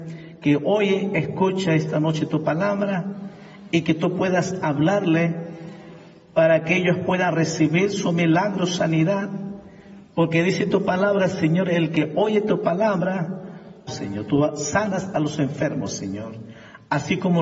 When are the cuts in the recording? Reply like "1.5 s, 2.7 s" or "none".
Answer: 13.9 s